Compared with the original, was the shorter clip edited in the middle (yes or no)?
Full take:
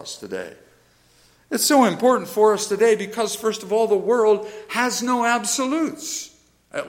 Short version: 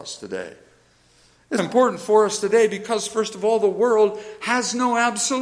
yes